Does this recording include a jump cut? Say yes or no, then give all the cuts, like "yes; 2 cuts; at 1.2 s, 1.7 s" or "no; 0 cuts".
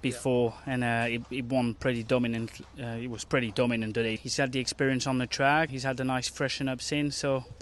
yes; 2 cuts; at 4.2 s, 5.7 s